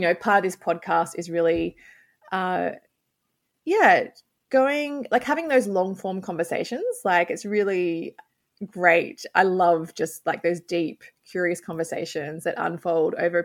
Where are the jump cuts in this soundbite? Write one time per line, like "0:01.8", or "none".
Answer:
none